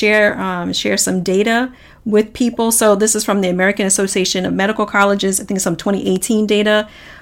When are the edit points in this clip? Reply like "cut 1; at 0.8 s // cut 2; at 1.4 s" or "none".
none